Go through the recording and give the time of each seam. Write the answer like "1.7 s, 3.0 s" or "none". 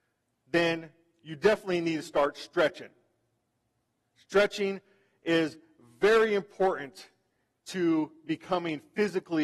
none

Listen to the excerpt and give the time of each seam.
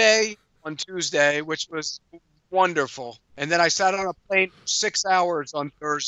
3.3 s

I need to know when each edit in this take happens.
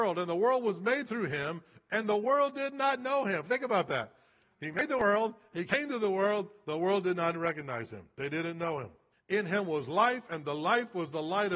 7.3 s, 9.1 s

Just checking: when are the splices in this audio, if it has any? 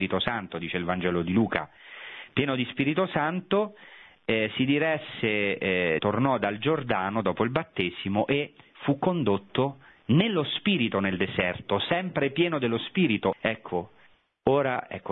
6.0 s, 13.3 s

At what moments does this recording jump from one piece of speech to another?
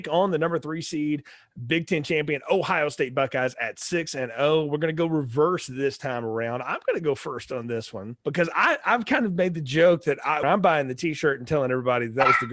8.2 s, 10.4 s

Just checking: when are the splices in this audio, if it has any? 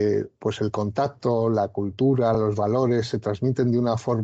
none

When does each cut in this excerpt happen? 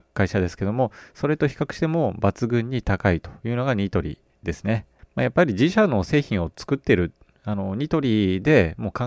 none

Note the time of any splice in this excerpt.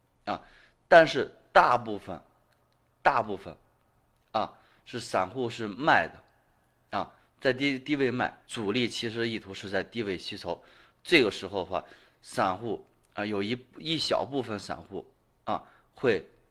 8.5 s

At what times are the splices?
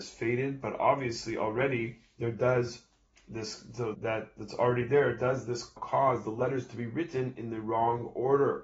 3.9 s, 5.8 s

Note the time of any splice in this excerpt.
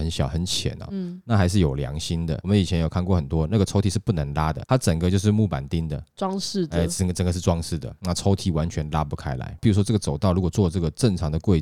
4.6 s, 9.6 s

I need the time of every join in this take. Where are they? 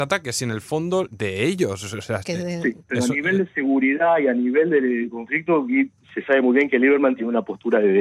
1.1 s, 2.2 s

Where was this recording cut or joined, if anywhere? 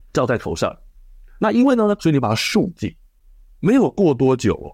2.0 s

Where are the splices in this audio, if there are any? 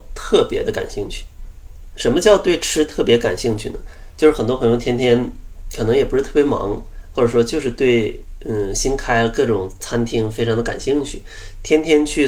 none

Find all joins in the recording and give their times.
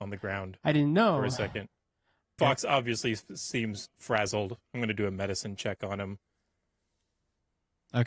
2.4 s

